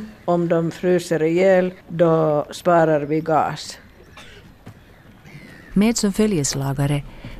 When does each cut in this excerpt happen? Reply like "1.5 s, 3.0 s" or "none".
1.8 s, 5.7 s